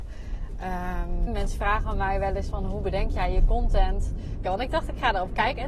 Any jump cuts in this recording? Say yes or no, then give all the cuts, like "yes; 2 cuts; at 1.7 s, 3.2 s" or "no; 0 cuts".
yes; 2 cuts; at 1.3 s, 4.4 s